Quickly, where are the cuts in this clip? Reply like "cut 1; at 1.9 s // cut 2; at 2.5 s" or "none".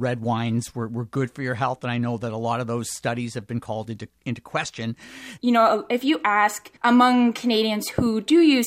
cut 1; at 5.4 s // cut 2; at 6.8 s